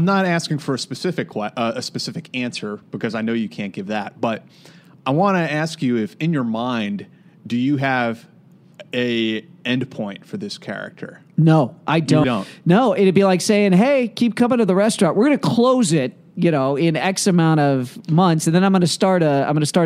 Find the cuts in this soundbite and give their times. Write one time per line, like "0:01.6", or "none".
0:12.2

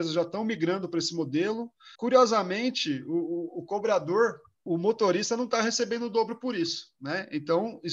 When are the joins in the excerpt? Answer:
0:02.0
0:04.7

